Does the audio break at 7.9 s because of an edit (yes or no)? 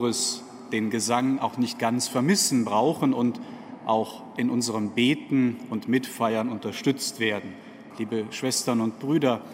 yes